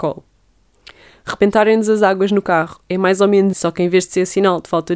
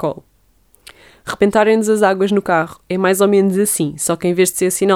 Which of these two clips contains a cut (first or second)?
first